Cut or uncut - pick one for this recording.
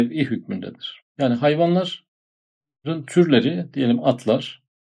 uncut